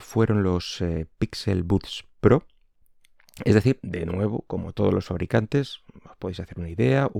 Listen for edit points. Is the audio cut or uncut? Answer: uncut